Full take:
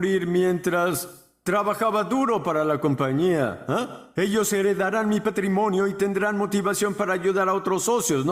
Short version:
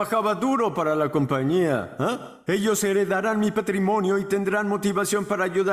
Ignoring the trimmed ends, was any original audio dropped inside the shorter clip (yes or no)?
no